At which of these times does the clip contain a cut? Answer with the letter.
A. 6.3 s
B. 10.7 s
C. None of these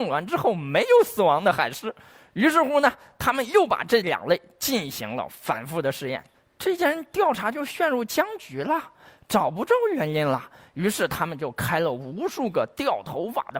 A